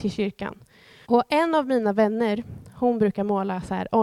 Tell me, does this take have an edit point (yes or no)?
yes